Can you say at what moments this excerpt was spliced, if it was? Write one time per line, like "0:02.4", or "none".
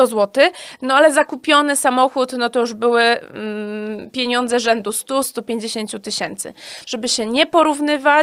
0:06.8